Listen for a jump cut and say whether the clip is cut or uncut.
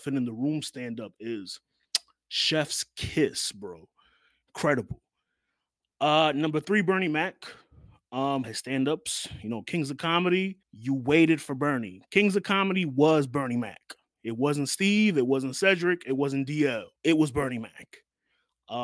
cut